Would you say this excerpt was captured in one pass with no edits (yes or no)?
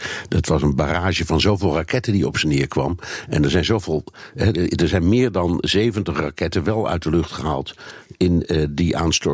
yes